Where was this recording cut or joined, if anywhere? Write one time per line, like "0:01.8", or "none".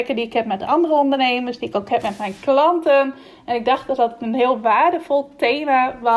none